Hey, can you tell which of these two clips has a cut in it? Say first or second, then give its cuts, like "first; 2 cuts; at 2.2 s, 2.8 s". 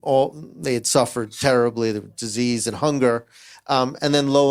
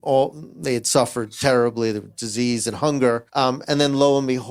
second; 1 cut; at 3.3 s